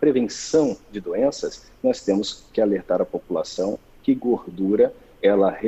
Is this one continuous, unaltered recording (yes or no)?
yes